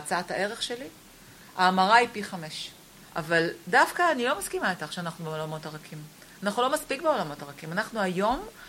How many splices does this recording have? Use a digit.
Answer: 1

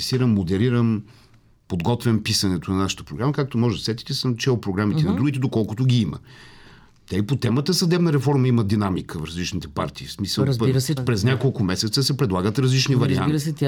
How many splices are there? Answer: 1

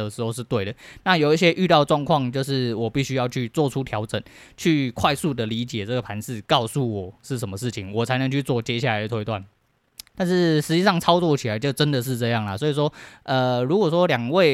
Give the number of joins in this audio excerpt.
1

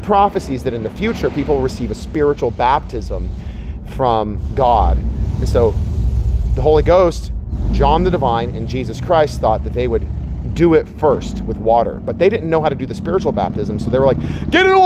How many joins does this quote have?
0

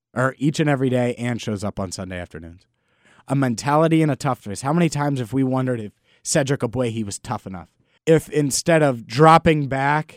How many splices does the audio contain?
1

